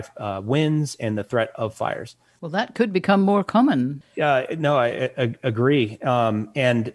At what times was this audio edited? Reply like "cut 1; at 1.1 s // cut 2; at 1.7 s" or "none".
cut 1; at 2.4 s